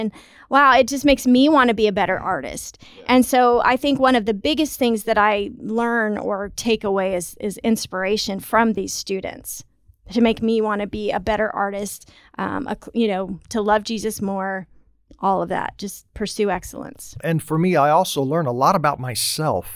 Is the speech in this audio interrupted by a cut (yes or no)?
yes